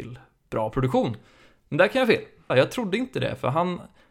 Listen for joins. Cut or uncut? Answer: cut